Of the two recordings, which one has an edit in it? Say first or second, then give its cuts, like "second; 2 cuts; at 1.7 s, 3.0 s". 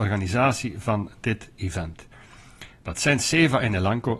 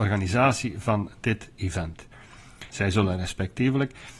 second; 1 cut; at 2.7 s